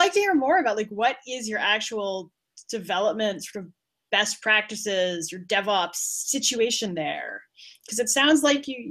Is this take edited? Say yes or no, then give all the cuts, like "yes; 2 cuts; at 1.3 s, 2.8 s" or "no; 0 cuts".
no; 0 cuts